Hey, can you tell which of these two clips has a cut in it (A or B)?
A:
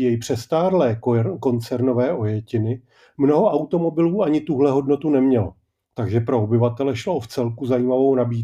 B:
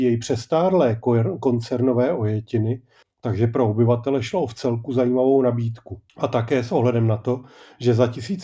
B